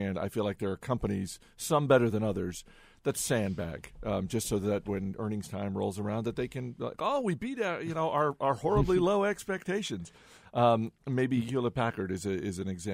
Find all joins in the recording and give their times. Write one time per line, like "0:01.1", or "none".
none